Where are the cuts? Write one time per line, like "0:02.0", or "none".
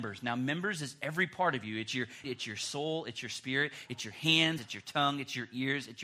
0:02.2
0:04.6